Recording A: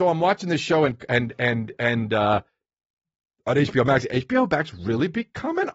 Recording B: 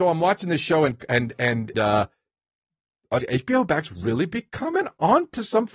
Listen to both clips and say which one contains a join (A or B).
B